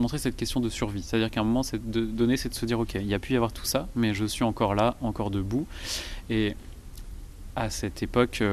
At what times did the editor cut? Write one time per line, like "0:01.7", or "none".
none